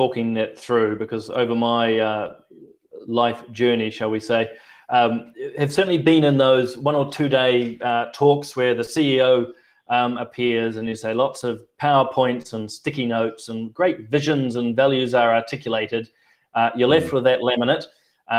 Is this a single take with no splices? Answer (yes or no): yes